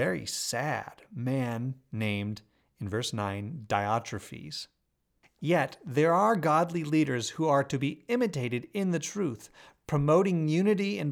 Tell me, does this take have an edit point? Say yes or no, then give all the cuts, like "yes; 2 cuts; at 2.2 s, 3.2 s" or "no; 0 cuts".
no; 0 cuts